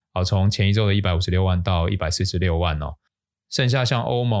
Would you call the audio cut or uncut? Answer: cut